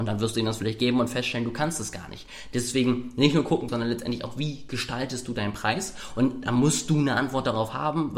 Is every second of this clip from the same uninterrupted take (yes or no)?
no